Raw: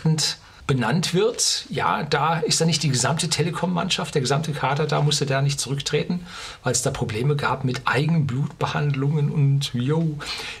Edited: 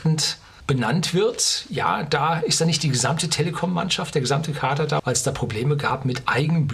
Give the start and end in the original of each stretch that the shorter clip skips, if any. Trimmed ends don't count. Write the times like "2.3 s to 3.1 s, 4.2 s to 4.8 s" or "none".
5.0 s to 6.6 s